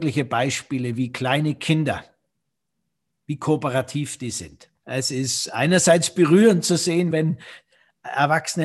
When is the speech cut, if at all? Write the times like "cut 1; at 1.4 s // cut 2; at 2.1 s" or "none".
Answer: cut 1; at 4.8 s // cut 2; at 7.1 s